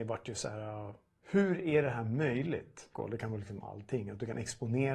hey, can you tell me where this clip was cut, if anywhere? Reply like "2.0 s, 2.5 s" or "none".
1.2 s, 2.9 s